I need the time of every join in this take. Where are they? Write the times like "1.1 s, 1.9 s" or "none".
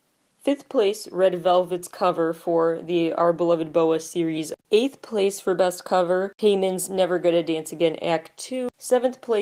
4.6 s